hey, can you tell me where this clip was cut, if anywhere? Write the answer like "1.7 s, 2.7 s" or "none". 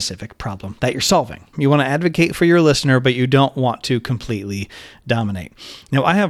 1.5 s